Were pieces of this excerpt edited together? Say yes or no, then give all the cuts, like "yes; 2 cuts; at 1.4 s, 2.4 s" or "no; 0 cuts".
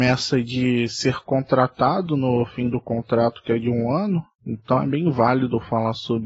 yes; 1 cut; at 4.3 s